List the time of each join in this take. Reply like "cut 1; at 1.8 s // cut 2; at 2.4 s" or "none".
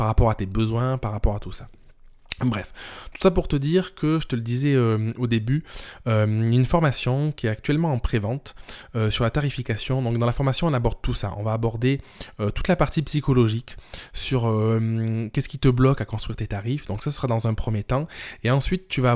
none